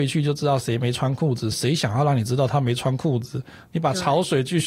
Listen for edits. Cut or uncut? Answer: cut